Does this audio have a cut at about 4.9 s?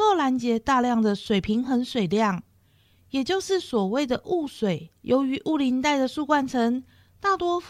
yes; 1 cut; at 4.9 s

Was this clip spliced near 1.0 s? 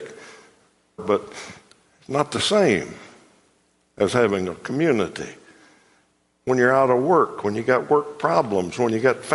yes; 1 cut; at 1.0 s

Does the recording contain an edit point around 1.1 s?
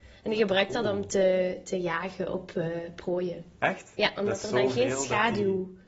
no; 0 cuts

